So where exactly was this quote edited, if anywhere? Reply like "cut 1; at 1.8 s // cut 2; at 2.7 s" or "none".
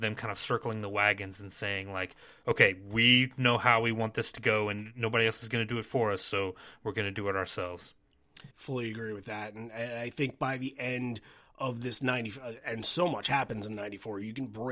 cut 1; at 8.5 s